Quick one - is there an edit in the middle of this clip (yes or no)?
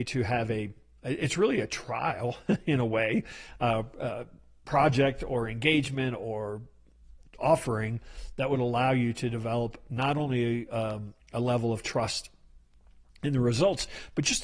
no